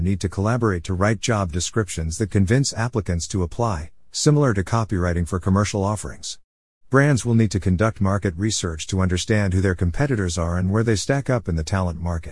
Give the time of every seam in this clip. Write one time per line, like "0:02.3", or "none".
0:06.8